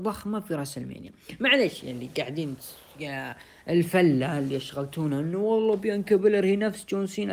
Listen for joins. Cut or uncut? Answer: uncut